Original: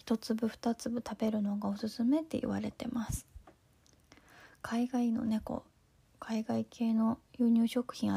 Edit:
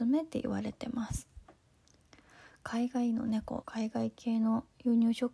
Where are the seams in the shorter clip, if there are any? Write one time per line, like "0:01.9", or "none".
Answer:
0:03.6